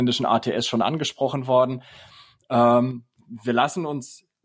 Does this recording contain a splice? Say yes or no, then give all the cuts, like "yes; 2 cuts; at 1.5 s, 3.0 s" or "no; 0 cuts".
no; 0 cuts